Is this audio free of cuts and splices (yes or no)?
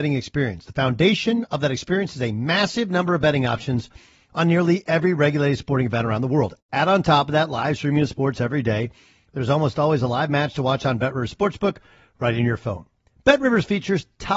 yes